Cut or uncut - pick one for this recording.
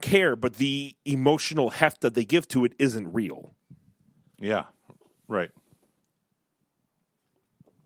uncut